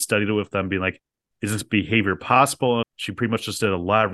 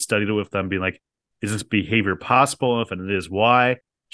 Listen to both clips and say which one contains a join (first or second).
first